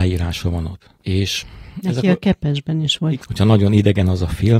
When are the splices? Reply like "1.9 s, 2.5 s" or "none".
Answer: 1.0 s, 3.1 s